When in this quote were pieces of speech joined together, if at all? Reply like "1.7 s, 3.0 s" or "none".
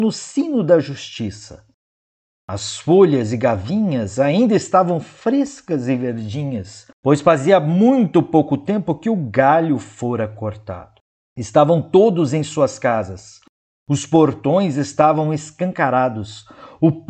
6.9 s, 11.2 s